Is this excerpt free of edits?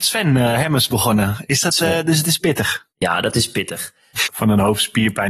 no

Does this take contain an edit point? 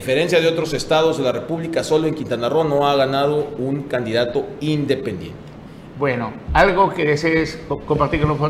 yes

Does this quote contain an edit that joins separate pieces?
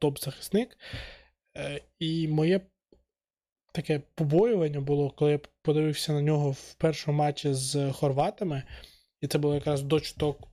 no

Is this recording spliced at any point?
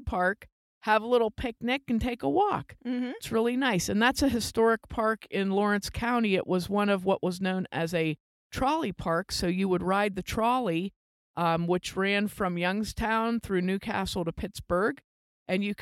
no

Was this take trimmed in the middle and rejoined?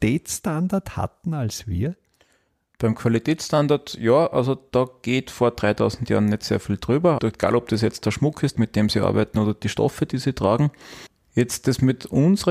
yes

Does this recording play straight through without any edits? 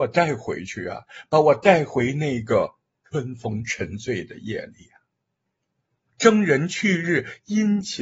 no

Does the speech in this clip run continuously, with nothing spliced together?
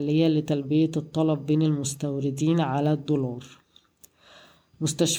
yes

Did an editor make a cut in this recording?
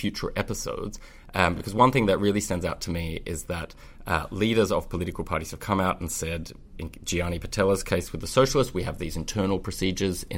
no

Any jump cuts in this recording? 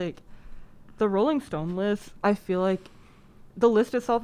no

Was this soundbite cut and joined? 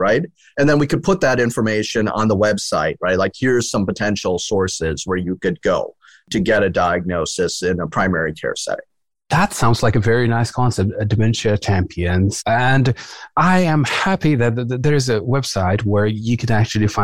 no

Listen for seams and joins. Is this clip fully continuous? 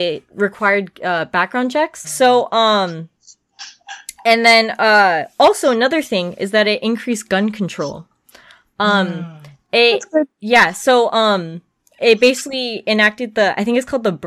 no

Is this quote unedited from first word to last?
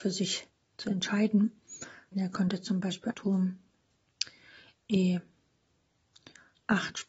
no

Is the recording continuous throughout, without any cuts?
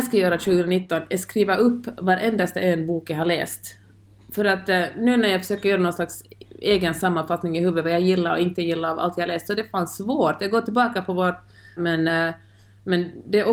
no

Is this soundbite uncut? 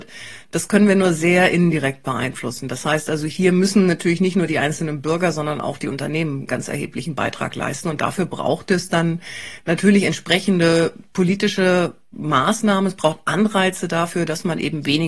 yes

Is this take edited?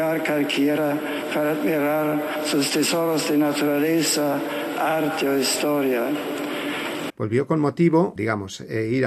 yes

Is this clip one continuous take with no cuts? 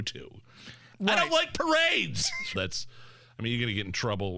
no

